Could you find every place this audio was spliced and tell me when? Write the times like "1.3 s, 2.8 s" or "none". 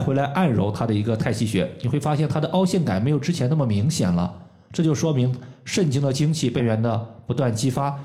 6.6 s